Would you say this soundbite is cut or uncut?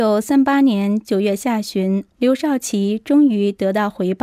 cut